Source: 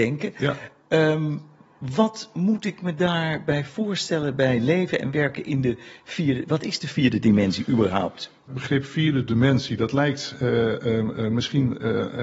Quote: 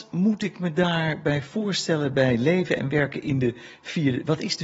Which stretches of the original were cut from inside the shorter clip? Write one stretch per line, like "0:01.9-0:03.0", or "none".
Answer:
none